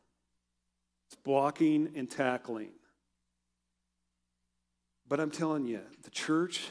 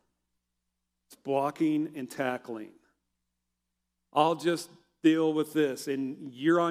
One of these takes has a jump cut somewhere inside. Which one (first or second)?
second